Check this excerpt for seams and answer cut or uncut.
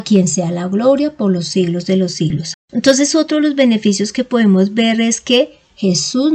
cut